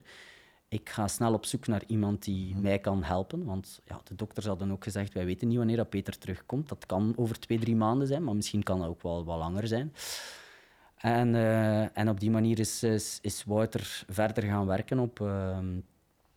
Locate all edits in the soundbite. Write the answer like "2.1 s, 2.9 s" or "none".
none